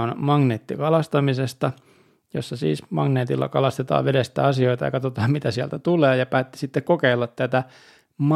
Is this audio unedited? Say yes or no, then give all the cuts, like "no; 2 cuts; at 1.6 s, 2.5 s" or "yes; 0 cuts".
yes; 0 cuts